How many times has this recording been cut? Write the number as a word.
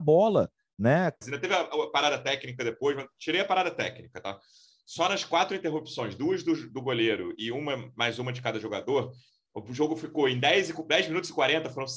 one